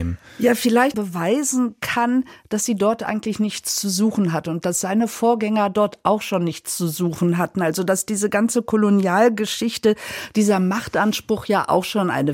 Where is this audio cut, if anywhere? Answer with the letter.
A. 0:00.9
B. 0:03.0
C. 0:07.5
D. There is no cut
A